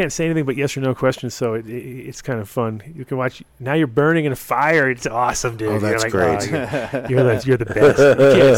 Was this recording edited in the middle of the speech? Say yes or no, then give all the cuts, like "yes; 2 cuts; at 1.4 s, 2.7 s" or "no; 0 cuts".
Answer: no; 0 cuts